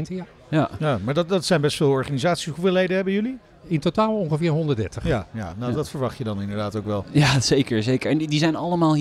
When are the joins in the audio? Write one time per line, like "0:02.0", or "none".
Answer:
none